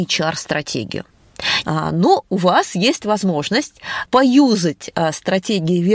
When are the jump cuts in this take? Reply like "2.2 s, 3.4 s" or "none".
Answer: 1.6 s, 4.1 s